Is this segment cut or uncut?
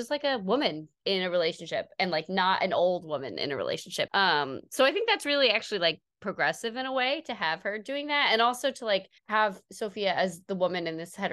cut